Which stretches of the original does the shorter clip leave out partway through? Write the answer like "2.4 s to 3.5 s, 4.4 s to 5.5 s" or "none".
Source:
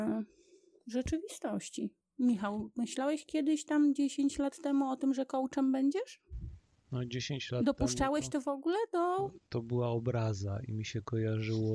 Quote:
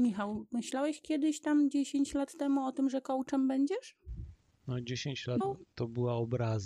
7.6 s to 9.1 s